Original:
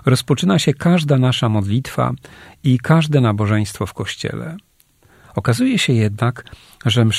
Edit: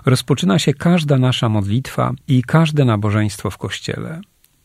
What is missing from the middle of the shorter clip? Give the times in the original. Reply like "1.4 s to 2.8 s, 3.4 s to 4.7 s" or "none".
2.2 s to 2.6 s